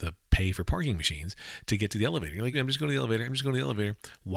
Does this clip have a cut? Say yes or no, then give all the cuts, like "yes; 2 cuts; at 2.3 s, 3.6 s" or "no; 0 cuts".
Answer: yes; 1 cut; at 2.5 s